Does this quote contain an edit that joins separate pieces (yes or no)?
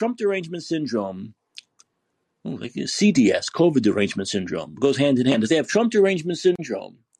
no